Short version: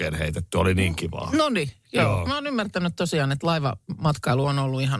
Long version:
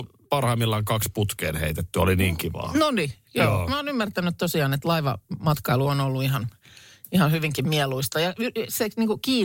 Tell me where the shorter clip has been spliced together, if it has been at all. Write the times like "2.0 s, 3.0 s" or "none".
none